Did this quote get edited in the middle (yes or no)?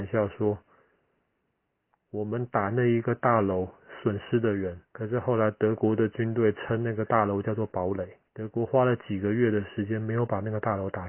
yes